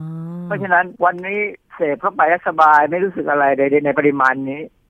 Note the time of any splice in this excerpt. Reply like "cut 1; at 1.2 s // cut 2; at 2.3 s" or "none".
cut 1; at 1.0 s